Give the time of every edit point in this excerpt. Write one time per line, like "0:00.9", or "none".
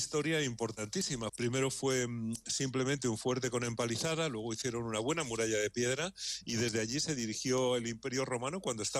0:01.3